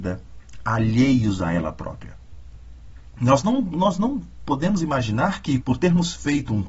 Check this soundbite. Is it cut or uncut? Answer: cut